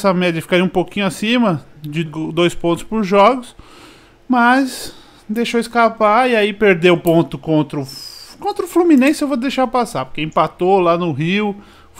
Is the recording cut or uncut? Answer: cut